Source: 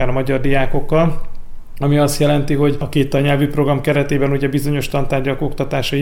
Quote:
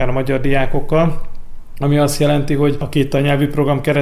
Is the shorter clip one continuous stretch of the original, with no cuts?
yes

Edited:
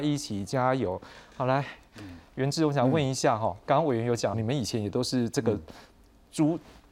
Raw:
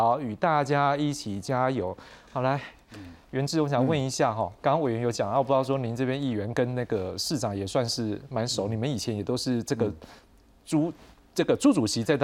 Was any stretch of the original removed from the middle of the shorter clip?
yes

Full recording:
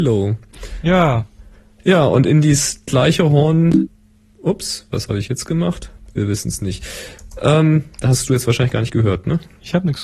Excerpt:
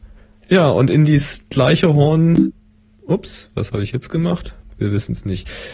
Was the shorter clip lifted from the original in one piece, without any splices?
yes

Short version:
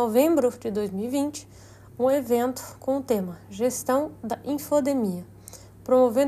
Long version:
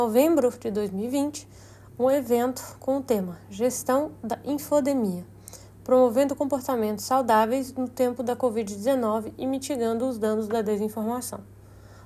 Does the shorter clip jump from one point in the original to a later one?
no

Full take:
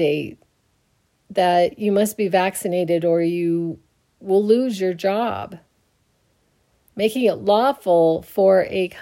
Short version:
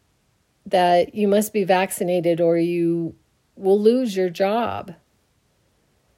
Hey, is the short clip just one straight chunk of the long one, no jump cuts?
yes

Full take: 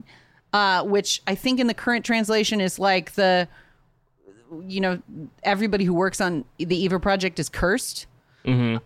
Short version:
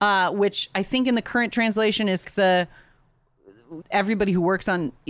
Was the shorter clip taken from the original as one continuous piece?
no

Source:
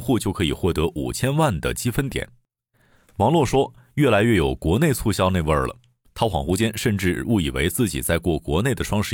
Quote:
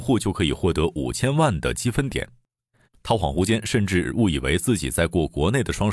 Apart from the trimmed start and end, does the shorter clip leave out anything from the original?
yes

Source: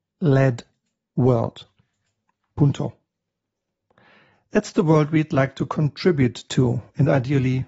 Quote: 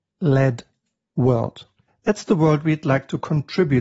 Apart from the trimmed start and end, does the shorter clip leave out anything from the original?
yes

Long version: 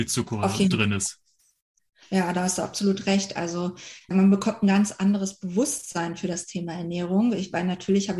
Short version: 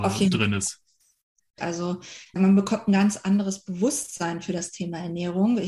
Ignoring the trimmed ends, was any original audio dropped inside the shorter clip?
yes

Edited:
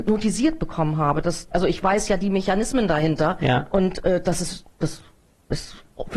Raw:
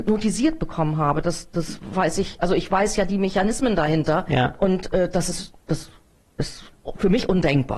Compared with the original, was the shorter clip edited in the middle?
yes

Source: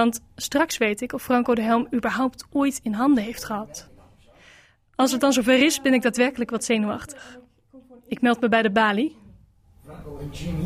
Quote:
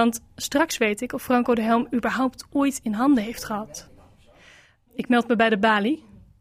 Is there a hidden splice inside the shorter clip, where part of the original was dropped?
yes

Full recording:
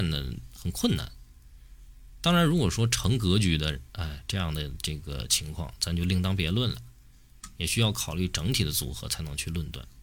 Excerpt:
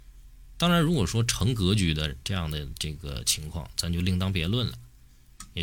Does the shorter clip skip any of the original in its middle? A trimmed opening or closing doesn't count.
yes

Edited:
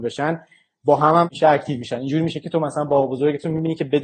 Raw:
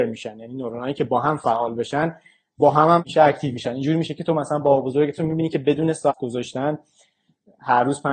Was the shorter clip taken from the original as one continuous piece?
yes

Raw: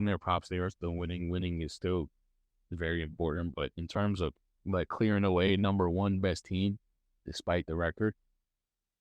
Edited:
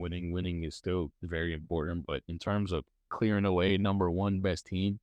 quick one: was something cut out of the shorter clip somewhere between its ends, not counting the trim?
yes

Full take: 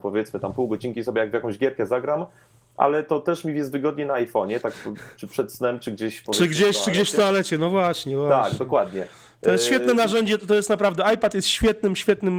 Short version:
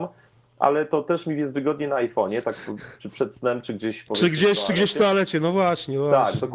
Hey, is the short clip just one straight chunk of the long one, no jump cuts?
yes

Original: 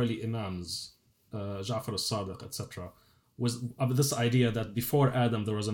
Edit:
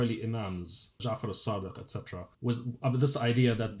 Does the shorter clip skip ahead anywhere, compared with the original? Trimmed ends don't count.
yes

